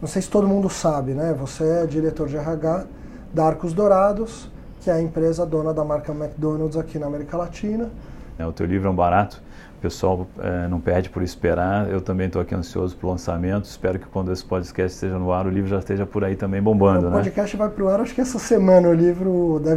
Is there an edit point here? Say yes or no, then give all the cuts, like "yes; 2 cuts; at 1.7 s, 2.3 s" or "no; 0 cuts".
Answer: yes; 1 cut; at 8.4 s